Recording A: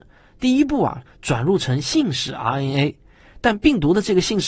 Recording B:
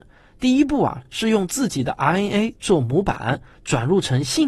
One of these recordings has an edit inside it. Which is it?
A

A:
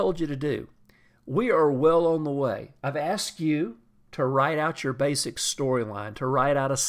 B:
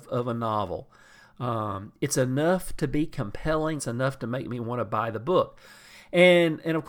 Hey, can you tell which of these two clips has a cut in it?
B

